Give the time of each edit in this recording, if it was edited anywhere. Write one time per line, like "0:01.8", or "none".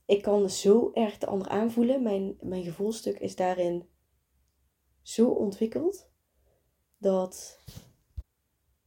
0:02.4